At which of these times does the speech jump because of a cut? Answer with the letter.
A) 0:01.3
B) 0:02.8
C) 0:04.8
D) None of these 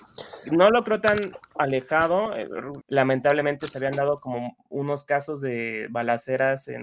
B